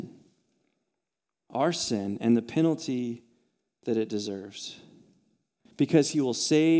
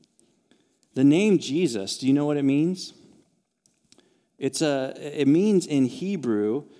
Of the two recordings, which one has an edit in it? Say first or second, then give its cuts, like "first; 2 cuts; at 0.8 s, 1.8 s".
first; 1 cut; at 5.7 s